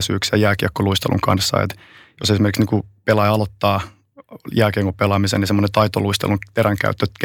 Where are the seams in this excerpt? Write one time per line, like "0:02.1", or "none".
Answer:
none